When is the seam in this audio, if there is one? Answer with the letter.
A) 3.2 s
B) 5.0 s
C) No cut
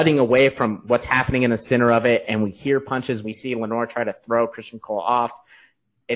A